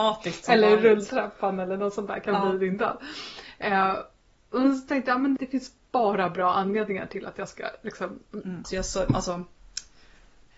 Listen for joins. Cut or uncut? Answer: cut